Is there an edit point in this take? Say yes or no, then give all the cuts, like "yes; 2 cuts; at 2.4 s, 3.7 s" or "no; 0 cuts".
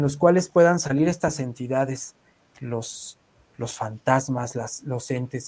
no; 0 cuts